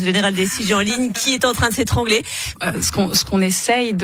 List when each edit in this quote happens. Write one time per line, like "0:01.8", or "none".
0:02.6